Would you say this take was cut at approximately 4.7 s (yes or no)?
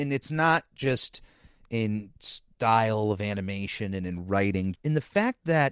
yes